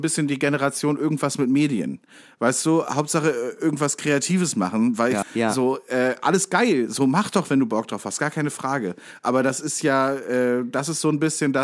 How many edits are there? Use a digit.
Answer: 1